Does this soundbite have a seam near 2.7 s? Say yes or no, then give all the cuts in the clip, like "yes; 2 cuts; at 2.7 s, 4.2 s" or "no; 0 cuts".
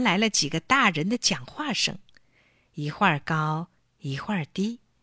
no; 0 cuts